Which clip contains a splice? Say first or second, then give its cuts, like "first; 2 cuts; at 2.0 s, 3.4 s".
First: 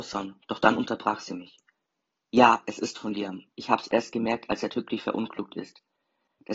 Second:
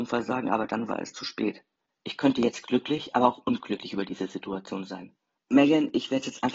second; 2 cuts; at 1.9 s, 5.4 s